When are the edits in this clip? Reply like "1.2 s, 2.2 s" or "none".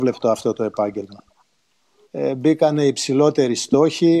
2.1 s